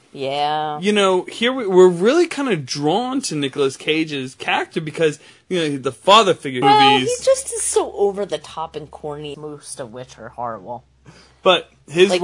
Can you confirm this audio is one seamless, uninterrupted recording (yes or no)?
no